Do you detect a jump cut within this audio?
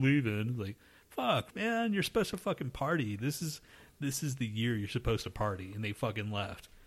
yes; 1 cut; at 1.5 s

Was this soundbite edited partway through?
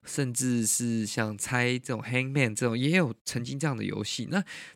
no; 0 cuts

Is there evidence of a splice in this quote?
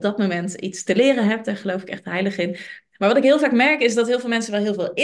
no; 0 cuts

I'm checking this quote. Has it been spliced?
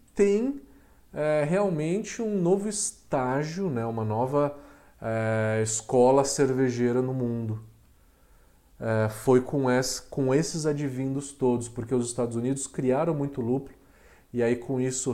no; 0 cuts

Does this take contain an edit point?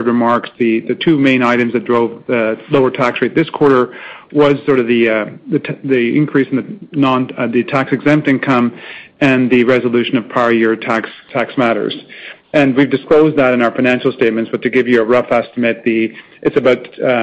no; 0 cuts

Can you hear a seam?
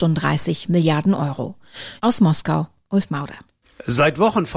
yes; 1 cut; at 2.0 s

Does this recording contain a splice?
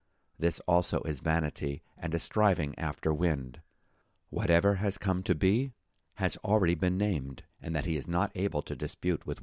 yes; 1 cut; at 7.5 s

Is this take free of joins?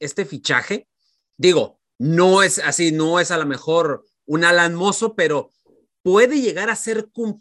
yes; 0 cuts

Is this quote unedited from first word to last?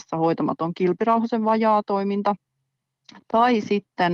yes; 0 cuts

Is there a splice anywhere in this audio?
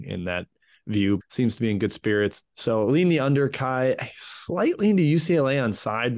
yes; 2 cuts; at 1.2 s, 2.4 s

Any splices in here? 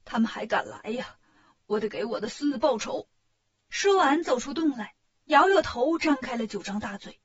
yes; 1 cut; at 5.2 s

